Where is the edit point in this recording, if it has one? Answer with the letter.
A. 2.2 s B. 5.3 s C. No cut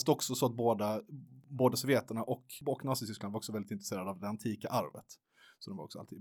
C